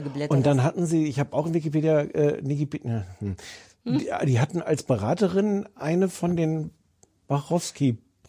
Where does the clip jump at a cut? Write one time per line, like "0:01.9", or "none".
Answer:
none